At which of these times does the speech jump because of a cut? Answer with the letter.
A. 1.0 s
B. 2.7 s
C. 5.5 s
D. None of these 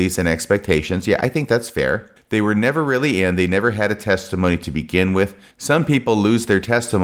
C